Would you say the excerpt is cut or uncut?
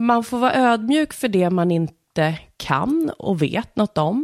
uncut